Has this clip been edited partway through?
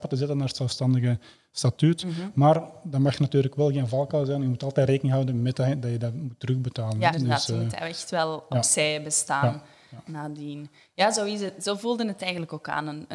yes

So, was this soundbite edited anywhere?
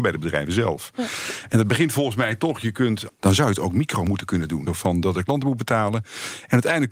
yes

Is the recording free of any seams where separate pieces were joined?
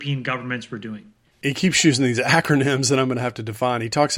no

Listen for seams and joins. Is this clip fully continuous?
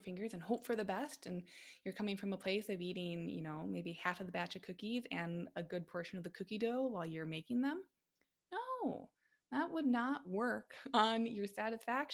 yes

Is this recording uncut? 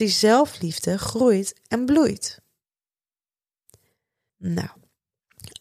no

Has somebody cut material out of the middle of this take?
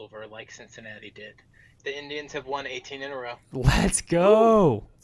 yes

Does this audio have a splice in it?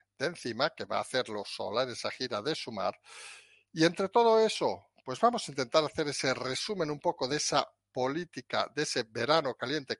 no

